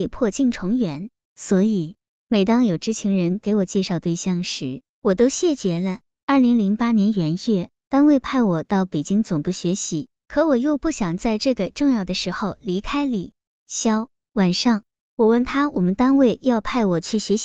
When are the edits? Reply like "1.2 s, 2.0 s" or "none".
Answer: none